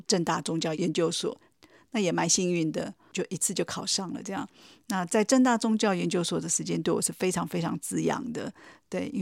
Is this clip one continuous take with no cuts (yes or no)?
yes